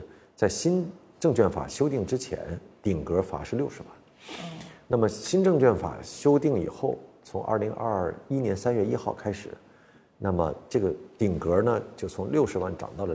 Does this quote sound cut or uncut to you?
uncut